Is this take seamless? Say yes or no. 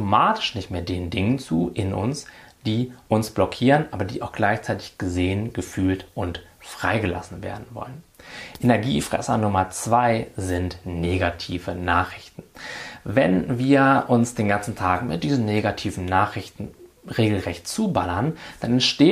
yes